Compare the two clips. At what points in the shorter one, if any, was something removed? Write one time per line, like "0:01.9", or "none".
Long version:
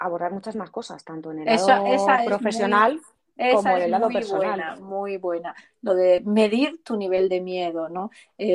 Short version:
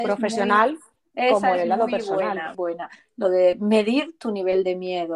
0:02.5